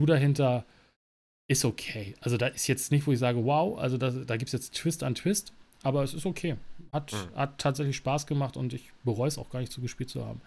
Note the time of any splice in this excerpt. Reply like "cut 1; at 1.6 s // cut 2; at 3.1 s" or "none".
none